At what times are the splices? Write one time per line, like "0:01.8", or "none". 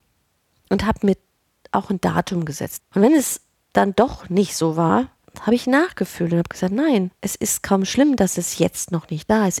0:02.8
0:07.2